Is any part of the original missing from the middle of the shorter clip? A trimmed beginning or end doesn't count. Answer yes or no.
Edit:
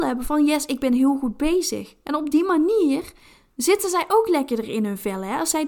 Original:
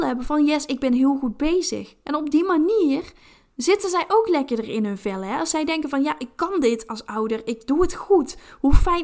no